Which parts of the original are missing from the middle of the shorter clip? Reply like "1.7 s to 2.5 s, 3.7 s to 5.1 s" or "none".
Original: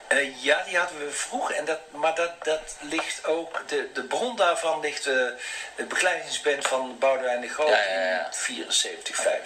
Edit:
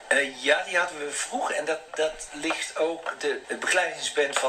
1.9 s to 2.4 s, 3.9 s to 5.7 s